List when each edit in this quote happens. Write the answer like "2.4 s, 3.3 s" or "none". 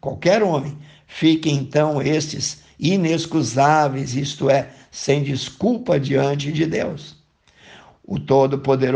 none

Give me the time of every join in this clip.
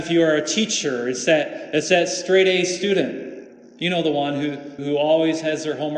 4.8 s

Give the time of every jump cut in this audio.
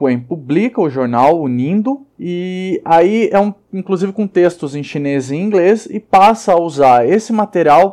2.1 s

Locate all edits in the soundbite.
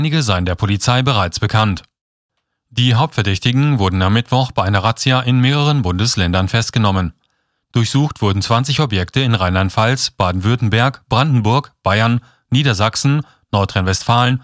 none

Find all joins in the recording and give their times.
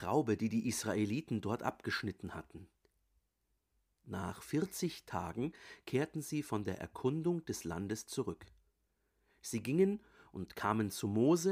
none

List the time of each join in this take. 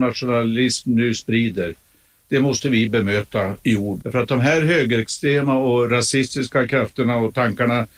4.0 s

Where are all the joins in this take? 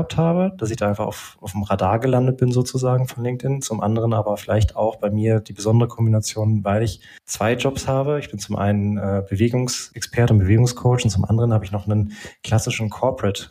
none

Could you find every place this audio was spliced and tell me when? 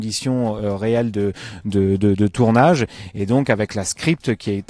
none

